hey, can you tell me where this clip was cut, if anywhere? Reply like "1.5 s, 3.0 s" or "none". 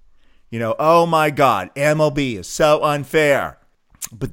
none